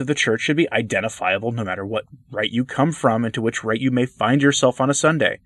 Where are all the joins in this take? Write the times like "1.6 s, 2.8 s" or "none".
none